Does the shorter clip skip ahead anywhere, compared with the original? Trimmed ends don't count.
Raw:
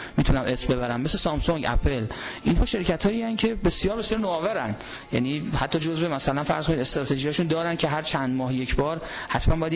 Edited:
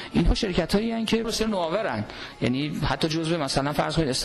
yes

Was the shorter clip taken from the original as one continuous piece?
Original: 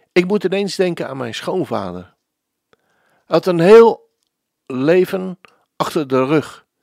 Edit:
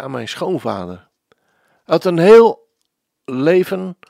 no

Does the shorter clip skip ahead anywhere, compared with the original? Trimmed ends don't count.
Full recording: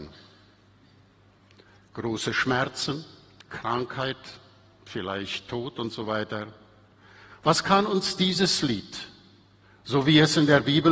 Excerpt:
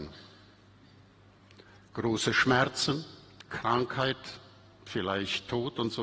no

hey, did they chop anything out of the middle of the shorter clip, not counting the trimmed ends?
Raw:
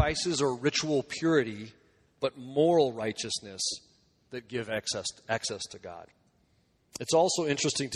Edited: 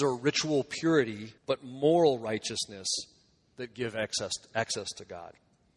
yes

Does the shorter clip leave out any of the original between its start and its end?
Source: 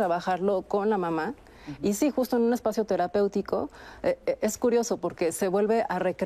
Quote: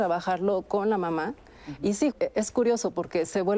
yes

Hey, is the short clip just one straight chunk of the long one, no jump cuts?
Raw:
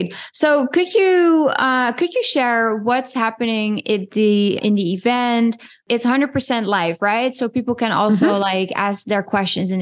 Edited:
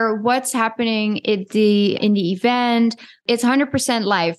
yes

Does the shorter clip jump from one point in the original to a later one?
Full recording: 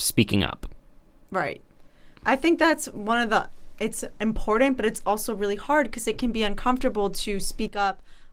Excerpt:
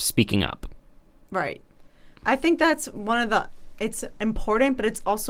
no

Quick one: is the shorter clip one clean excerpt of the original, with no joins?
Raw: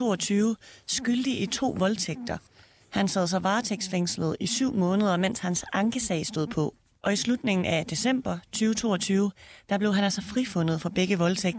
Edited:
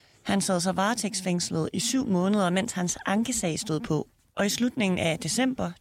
yes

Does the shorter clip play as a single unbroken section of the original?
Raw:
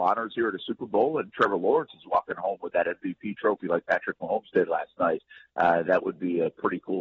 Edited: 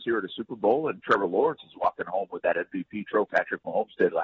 no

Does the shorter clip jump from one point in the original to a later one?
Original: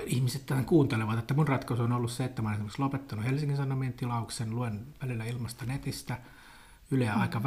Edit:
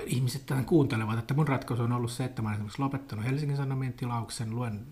no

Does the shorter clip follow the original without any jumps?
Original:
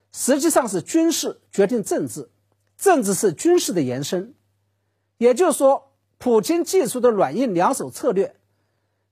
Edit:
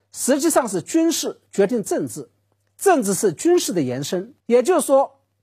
no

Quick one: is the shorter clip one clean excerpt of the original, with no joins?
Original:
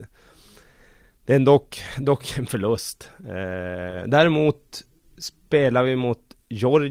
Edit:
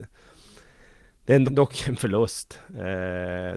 no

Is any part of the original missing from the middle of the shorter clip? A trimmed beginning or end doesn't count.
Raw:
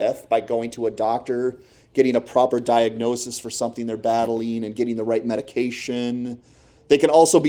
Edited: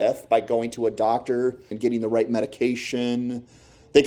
yes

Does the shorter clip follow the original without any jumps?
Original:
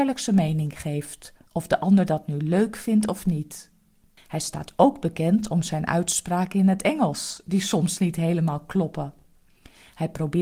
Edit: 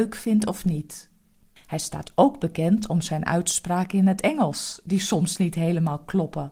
yes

